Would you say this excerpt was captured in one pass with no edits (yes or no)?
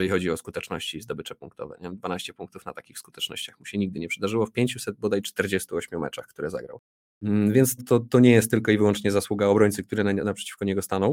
no